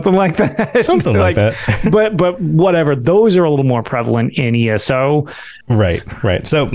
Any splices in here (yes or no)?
yes